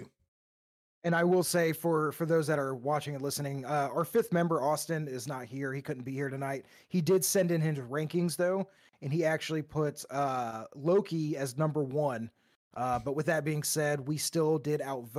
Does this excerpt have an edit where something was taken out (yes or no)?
no